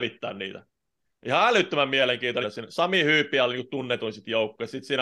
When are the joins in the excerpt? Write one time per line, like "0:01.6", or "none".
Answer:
0:02.4